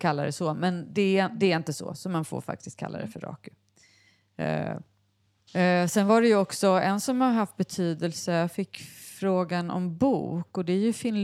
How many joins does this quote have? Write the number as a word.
one